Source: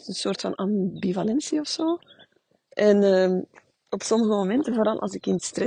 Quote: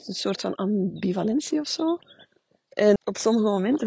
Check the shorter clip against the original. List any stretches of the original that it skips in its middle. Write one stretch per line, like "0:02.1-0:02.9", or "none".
0:03.0-0:03.8